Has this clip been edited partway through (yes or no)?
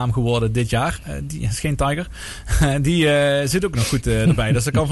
no